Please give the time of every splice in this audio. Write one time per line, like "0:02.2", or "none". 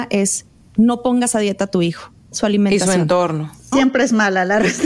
0:02.3
0:03.7